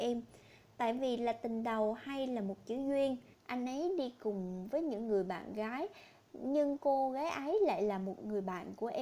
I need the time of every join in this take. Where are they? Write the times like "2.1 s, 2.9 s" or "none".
3.3 s